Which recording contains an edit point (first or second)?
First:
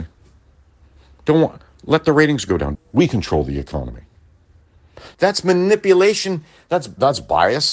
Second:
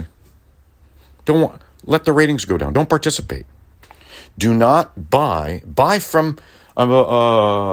first